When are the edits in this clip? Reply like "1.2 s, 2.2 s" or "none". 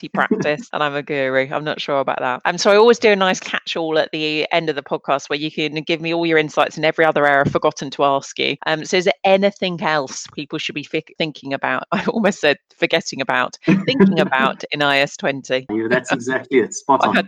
15.7 s